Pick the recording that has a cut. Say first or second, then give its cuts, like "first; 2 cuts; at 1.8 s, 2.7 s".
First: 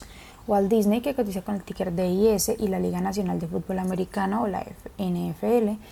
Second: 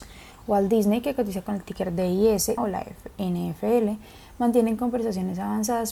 second; 1 cut; at 2.6 s